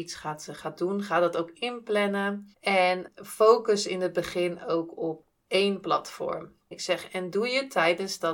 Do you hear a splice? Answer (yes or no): yes